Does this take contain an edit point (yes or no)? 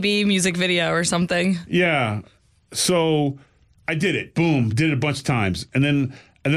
no